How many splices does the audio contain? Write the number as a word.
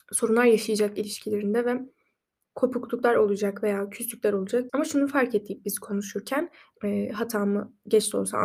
two